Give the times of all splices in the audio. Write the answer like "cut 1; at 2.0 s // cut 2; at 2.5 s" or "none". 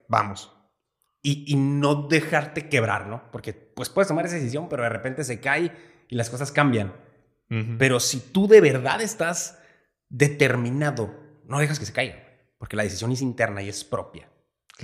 none